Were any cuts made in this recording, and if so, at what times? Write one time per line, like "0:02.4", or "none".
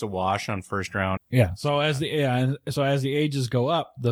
0:01.2